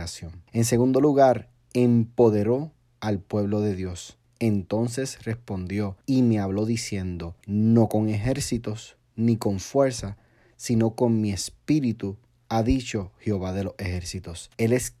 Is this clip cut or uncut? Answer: uncut